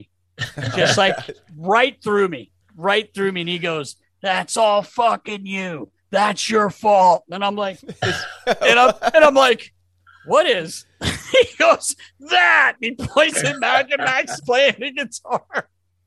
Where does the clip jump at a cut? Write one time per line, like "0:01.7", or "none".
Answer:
0:02.6
0:14.4